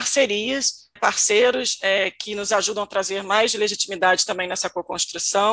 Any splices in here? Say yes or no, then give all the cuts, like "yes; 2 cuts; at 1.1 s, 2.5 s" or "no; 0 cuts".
yes; 1 cut; at 1.0 s